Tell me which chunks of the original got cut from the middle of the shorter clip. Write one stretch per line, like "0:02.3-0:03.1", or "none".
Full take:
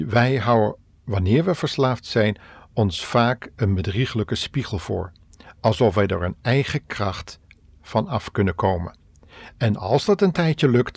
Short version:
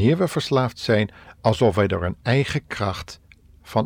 0:02.5-0:05.4